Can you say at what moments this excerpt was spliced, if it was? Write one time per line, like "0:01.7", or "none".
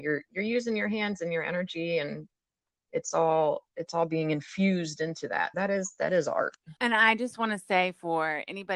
0:05.5
0:06.8